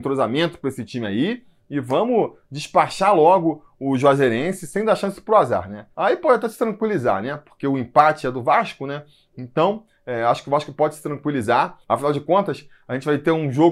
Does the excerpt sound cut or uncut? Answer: cut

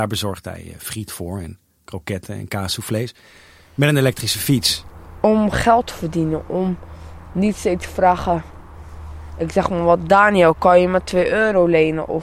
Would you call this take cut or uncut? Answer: uncut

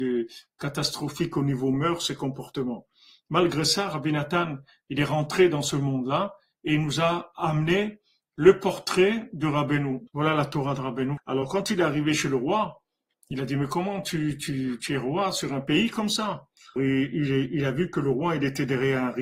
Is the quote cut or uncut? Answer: cut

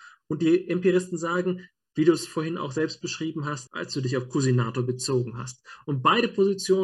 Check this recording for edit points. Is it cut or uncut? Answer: cut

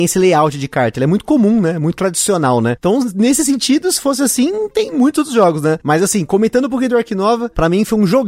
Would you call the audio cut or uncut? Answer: uncut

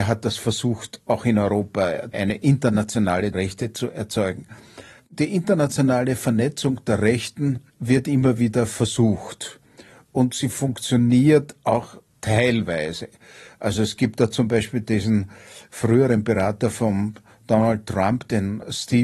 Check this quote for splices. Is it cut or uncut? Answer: cut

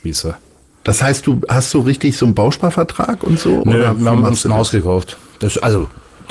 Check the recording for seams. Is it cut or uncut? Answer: uncut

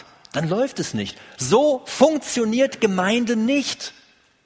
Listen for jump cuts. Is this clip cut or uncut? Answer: uncut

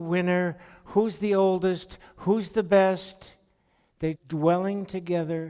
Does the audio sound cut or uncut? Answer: cut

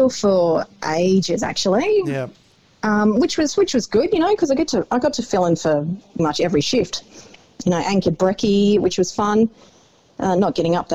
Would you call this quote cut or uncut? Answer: cut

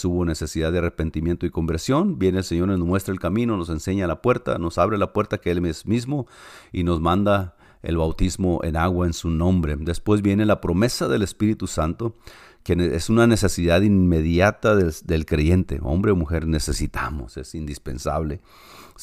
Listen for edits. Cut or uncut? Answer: uncut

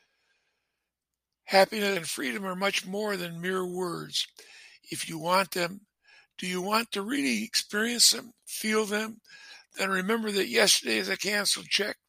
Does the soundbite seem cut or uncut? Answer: cut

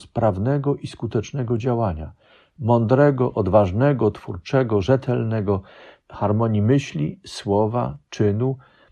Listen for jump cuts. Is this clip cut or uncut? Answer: cut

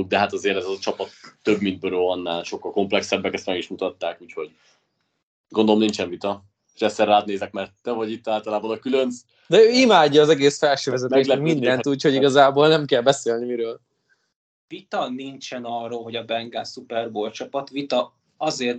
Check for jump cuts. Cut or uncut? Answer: uncut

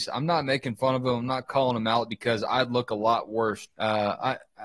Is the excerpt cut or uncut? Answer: cut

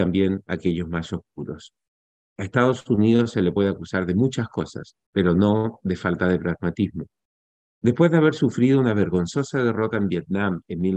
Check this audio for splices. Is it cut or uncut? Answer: uncut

